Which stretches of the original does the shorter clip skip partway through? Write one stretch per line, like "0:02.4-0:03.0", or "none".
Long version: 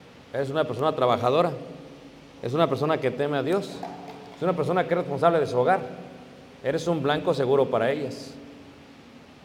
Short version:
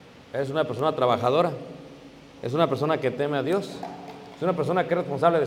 none

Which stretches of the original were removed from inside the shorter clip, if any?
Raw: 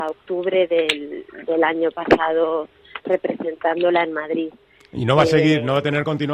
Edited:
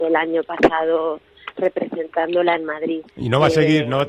0:04.6-0:04.8

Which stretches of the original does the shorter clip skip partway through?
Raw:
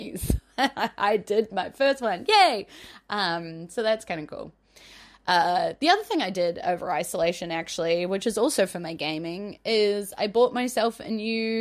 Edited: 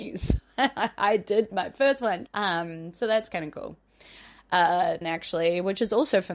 0:02.3-0:03.0
0:05.8-0:07.5

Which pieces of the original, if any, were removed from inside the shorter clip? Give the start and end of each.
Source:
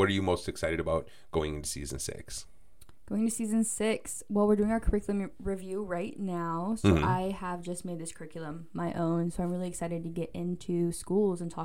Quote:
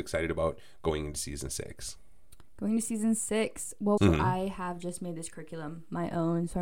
0:04.5-0:06.8

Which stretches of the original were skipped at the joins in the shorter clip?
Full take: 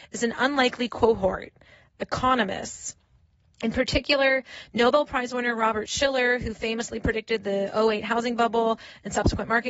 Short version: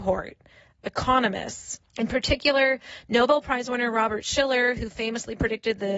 0:03.0-0:03.5

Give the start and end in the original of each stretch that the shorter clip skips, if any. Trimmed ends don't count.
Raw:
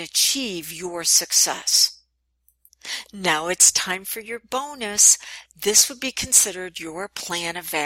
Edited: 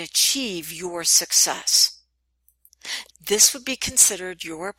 0:03.1-0:05.5

